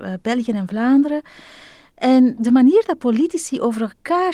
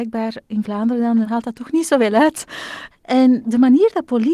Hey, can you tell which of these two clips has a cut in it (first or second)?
second